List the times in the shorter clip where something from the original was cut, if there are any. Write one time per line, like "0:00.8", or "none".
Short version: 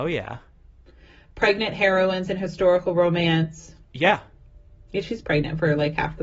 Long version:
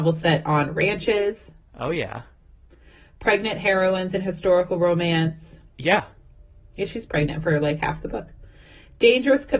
none